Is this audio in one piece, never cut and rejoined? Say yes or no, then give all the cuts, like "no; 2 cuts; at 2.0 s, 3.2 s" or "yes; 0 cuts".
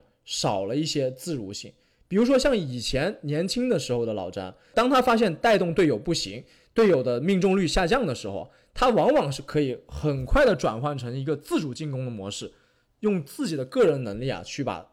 yes; 0 cuts